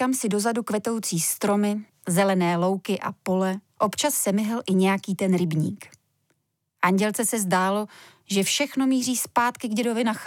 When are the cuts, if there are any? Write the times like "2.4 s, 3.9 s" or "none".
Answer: 3.7 s